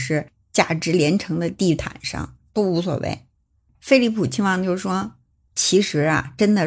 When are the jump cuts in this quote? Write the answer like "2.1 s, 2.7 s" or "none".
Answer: 3.7 s, 5.5 s